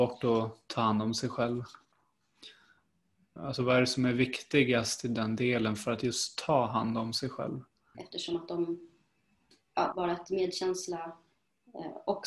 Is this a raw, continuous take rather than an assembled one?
no; 3 cuts; at 3.4 s, 7.9 s, 9.9 s

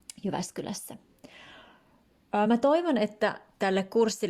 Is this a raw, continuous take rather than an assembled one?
yes; 0 cuts

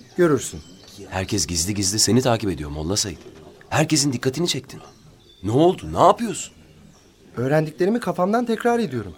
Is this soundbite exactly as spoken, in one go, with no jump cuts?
yes; 0 cuts

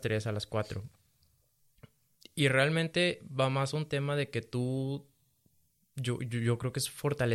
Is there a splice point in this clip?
no; 0 cuts

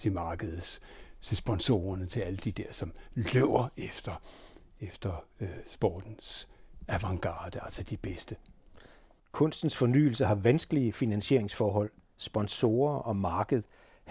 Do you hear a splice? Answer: yes; 1 cut; at 9.2 s

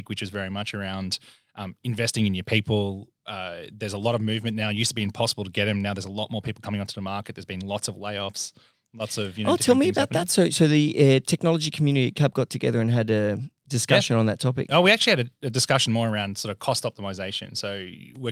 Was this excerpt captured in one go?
yes; 0 cuts

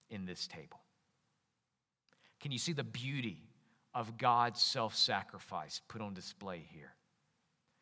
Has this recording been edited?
no; 0 cuts

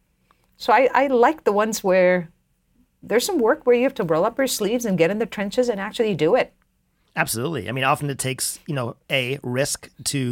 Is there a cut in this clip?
no; 0 cuts

